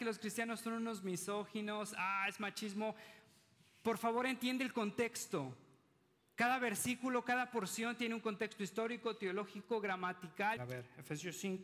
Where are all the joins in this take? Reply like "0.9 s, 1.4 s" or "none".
10.6 s